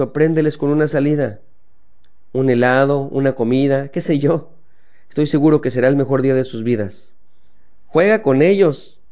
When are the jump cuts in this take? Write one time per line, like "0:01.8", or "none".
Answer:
none